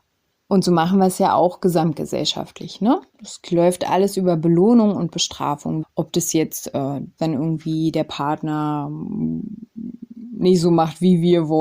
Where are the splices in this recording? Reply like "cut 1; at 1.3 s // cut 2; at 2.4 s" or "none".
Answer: cut 1; at 5.8 s // cut 2; at 7.2 s